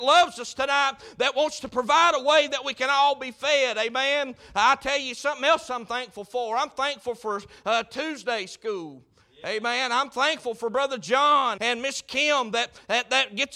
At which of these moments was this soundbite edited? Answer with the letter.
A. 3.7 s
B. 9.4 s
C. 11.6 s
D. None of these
C